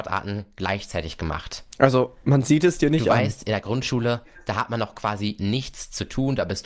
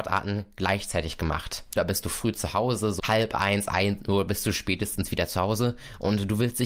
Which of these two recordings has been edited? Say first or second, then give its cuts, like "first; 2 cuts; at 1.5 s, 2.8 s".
second; 2 cuts; at 1.8 s, 3.0 s